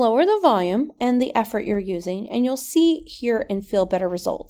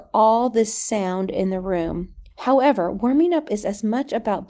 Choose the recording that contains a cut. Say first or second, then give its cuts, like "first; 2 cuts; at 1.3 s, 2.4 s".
second; 1 cut; at 2.3 s